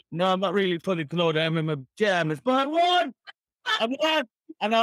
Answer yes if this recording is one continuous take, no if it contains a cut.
yes